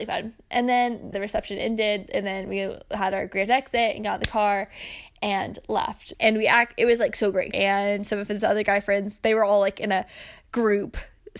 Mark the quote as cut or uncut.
cut